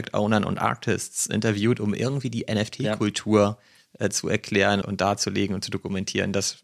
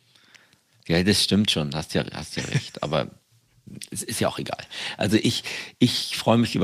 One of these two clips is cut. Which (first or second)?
first